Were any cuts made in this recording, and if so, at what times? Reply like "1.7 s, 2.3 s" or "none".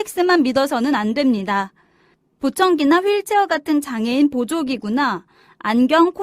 none